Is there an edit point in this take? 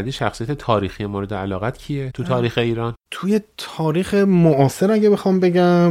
no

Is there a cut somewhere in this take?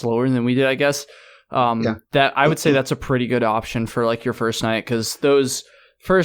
no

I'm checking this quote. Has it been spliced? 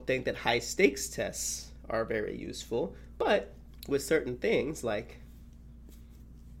no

